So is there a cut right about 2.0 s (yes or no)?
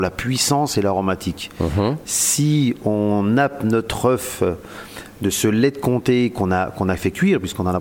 yes